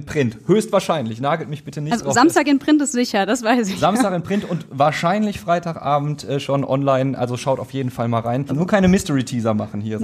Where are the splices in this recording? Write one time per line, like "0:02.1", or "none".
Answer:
0:08.5